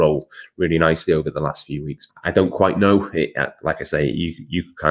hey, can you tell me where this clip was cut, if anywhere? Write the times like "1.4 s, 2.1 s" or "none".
2.1 s